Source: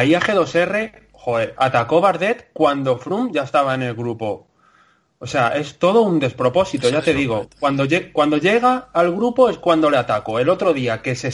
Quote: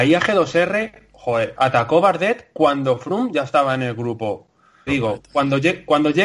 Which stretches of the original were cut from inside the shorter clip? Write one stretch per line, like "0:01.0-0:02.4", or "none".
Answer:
0:04.9-0:07.1